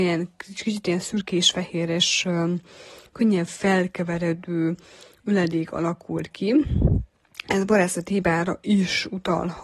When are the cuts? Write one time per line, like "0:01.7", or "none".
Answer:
none